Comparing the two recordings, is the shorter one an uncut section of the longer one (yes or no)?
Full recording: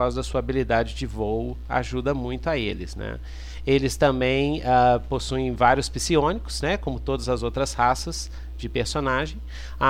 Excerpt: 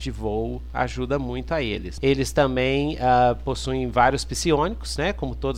no